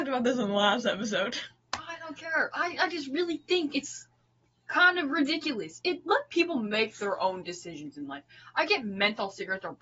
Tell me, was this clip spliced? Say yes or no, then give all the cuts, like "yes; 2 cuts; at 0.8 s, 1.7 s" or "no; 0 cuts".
no; 0 cuts